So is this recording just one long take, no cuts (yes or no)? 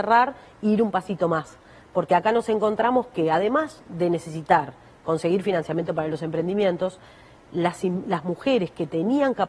yes